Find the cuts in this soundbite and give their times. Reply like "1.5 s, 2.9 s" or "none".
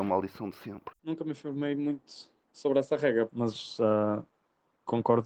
1.0 s, 3.3 s

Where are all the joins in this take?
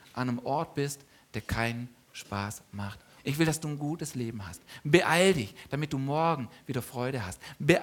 3.2 s

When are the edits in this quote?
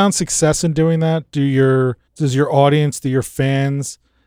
2.1 s

